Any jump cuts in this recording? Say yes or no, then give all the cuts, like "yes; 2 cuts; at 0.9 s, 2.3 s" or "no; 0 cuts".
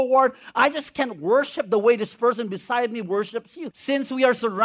yes; 1 cut; at 3.7 s